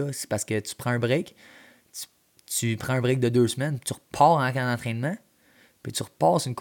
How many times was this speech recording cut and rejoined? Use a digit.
0